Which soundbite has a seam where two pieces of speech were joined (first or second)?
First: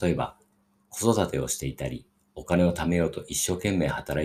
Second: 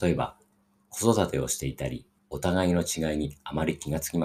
second